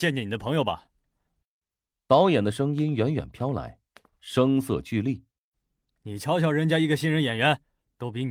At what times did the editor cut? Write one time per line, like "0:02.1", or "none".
0:01.9
0:05.3